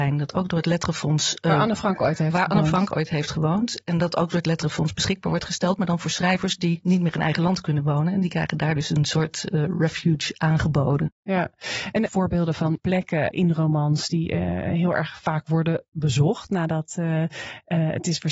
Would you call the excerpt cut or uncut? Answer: cut